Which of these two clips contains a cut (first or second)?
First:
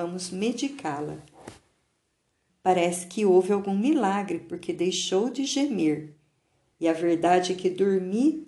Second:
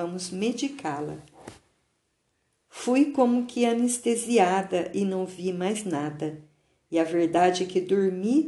first